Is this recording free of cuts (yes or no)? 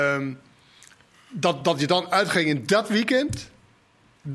yes